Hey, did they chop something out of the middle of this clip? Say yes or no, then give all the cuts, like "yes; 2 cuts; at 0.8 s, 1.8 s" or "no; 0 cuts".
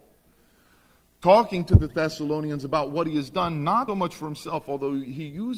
yes; 1 cut; at 3.9 s